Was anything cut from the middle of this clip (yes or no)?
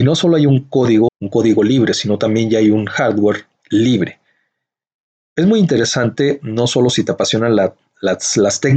yes